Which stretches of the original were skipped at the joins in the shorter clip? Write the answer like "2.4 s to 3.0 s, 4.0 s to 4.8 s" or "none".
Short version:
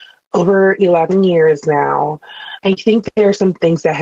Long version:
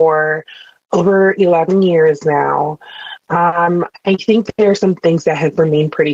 3.2 s to 4.0 s